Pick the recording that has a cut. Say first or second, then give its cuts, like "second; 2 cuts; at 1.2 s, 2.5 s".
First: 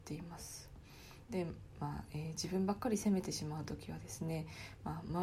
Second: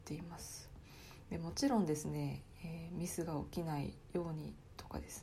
first; 1 cut; at 1.3 s